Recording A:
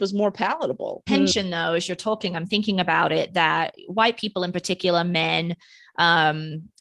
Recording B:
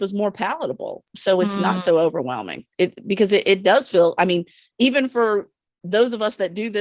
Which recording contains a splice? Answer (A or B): A